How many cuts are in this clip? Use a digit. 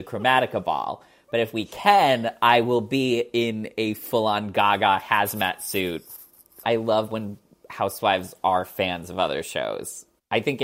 1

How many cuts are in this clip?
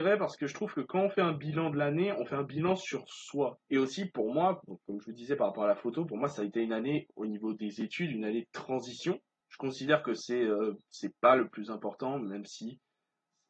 2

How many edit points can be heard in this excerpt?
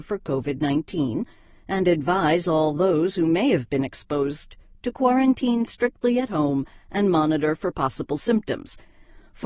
0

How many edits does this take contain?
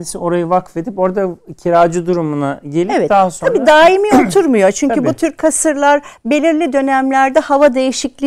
0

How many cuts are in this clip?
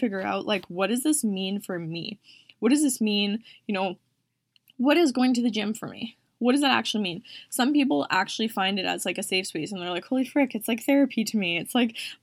0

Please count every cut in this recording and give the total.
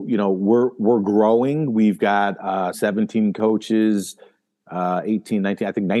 1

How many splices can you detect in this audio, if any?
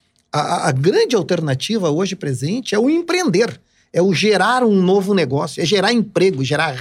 0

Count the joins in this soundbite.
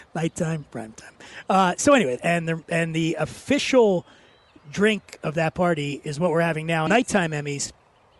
2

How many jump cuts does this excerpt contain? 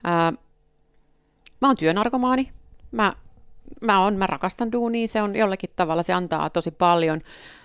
0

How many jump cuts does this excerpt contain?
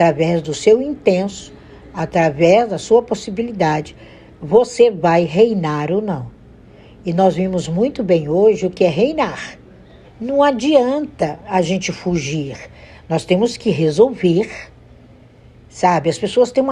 1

